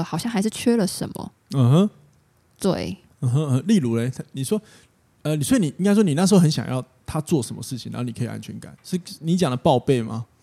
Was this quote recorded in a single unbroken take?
yes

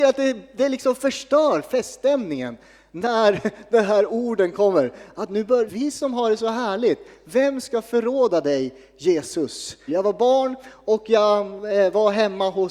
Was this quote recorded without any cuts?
no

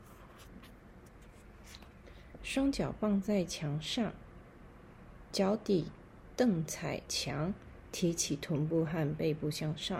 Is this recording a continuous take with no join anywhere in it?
no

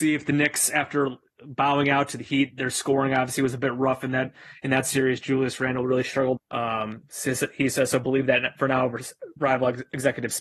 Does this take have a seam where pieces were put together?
yes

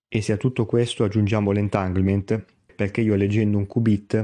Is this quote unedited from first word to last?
no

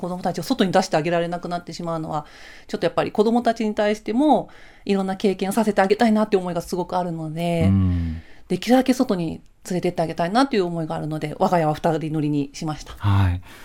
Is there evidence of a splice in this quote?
no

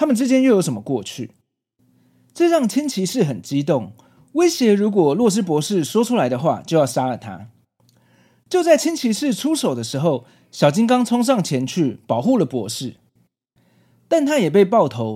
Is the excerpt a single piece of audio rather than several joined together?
yes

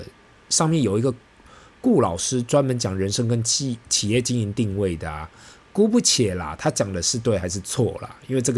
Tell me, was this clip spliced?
no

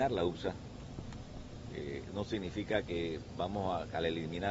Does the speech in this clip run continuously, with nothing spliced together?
no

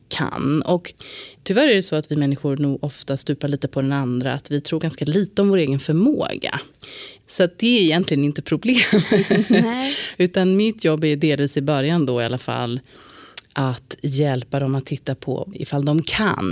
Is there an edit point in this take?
yes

